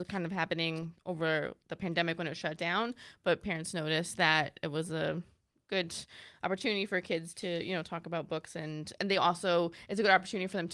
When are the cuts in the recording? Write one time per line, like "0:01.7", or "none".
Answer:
none